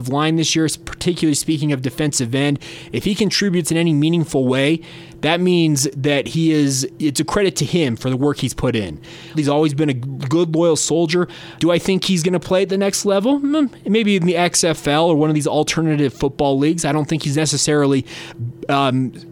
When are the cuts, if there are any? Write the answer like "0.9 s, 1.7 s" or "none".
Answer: 9.3 s, 11.6 s